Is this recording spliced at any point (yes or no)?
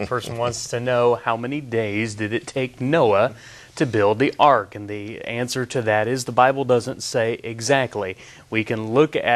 no